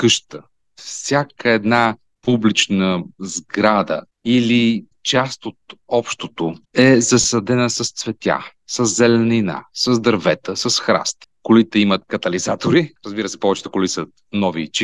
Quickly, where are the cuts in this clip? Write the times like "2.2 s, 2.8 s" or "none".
11.3 s